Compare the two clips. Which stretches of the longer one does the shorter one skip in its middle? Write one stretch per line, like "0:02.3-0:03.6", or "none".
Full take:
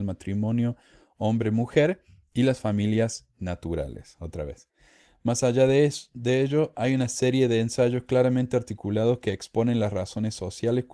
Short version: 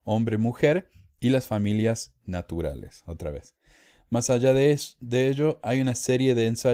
none